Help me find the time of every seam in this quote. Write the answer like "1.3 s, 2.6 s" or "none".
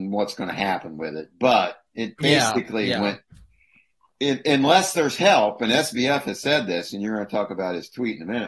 none